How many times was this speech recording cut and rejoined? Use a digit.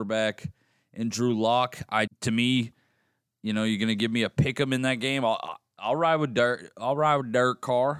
1